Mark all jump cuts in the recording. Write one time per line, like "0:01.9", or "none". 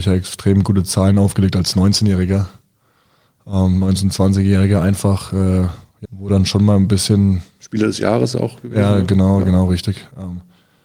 0:06.1